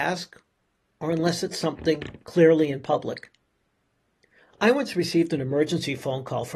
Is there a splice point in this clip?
no; 0 cuts

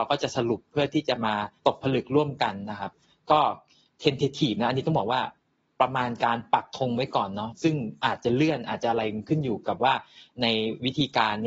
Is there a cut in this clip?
yes; 1 cut; at 1.6 s

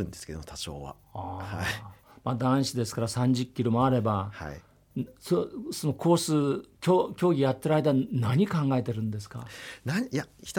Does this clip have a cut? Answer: no; 0 cuts

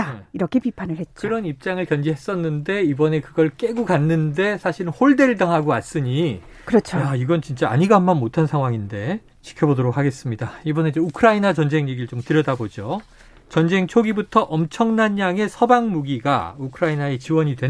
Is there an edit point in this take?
yes; 1 cut; at 9.3 s

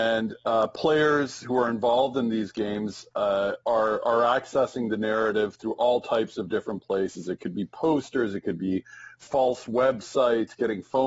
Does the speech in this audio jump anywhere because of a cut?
no; 0 cuts

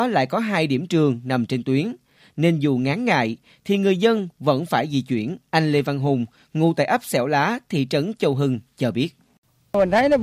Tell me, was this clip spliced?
yes; 1 cut; at 5.4 s

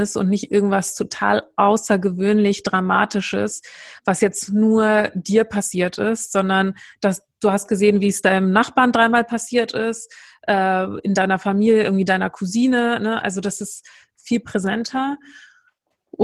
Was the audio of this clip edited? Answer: no; 0 cuts

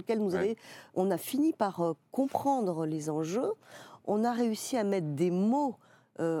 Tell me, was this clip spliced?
yes; 1 cut; at 0.9 s

